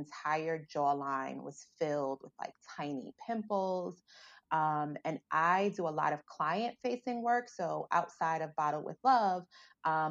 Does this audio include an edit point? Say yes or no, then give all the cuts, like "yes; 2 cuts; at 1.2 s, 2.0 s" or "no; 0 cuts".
no; 0 cuts